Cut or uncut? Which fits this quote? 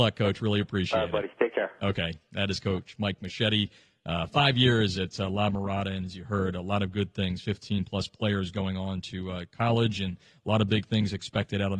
uncut